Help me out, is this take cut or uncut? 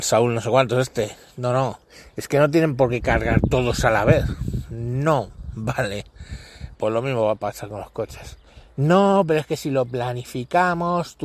cut